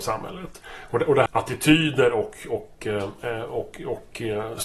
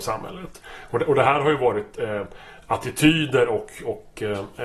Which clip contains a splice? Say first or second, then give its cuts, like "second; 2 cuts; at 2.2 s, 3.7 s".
first; 1 cut; at 1.3 s